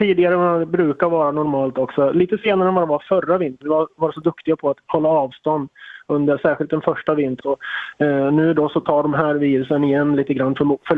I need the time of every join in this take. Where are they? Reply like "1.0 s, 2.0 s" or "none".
3.6 s, 7.4 s